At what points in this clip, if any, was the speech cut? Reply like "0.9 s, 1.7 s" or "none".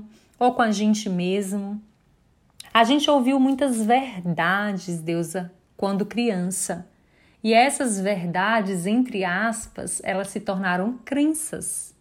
2.6 s